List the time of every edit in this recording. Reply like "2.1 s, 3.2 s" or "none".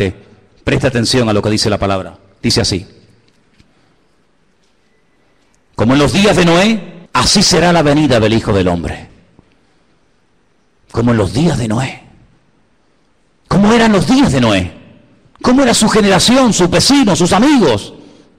7.1 s